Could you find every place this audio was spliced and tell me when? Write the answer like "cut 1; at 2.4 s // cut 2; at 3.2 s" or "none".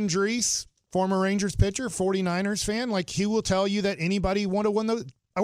none